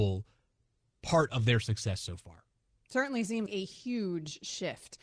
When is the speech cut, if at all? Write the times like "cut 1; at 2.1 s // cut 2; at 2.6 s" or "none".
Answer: cut 1; at 3.5 s